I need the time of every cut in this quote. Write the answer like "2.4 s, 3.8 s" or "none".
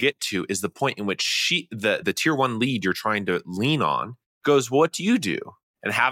2.0 s